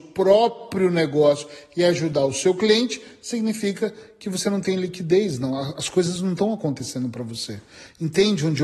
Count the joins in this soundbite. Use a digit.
0